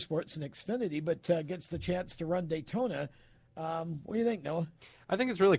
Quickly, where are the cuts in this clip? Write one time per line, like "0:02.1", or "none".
none